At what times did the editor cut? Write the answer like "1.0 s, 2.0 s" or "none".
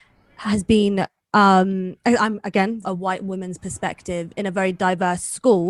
2.8 s